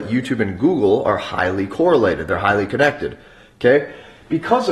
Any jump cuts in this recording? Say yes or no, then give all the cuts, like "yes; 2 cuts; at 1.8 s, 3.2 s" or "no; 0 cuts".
no; 0 cuts